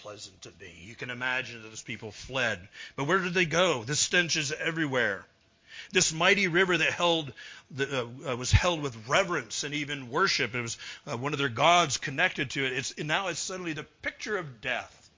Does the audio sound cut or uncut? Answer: uncut